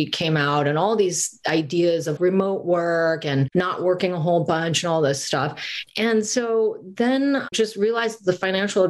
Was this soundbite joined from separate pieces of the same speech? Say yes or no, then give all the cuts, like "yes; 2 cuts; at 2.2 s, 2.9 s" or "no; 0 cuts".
yes; 2 cuts; at 2.2 s, 7.5 s